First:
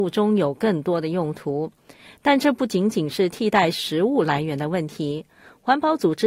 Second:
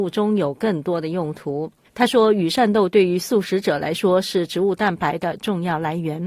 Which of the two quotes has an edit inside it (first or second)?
second